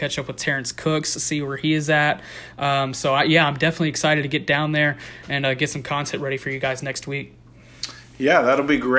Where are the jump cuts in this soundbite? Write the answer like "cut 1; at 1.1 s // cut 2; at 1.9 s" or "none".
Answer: none